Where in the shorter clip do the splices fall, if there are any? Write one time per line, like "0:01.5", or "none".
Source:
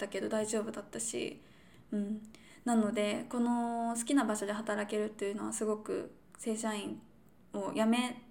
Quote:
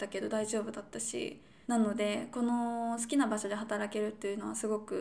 0:01.6